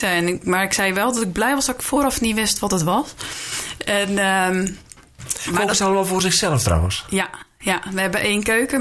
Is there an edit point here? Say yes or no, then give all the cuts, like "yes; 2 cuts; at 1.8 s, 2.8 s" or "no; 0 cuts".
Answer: no; 0 cuts